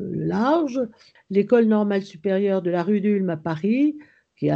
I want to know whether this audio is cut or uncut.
cut